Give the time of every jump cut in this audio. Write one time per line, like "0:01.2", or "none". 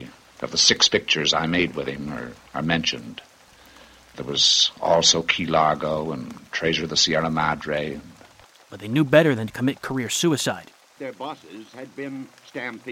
0:08.6
0:11.0